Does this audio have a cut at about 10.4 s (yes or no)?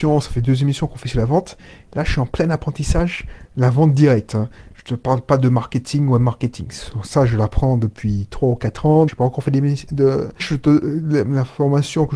yes